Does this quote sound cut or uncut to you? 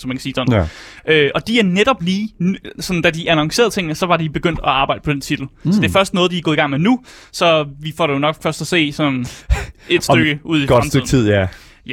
uncut